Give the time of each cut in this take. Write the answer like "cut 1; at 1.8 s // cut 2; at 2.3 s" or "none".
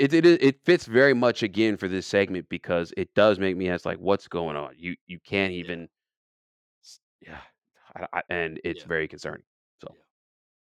cut 1; at 8.2 s